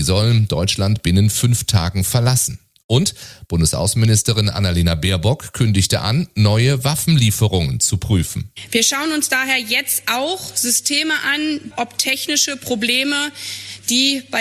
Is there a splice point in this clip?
yes; 2 cuts; at 8.7 s, 11.7 s

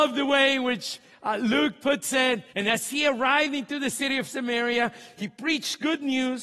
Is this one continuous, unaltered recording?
no; 1 cut; at 2.5 s

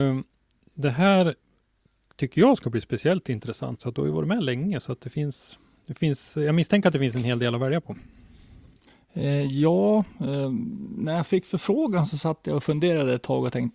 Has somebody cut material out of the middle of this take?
yes; 1 cut; at 3.8 s

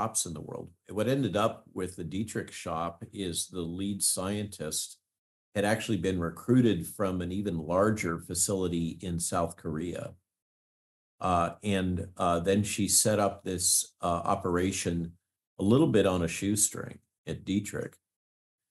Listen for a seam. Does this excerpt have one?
no; 0 cuts

